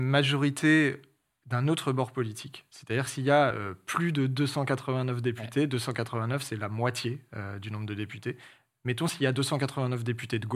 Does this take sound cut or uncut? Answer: uncut